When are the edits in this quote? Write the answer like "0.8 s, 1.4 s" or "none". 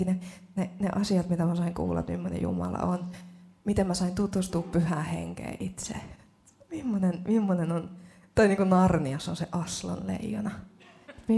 none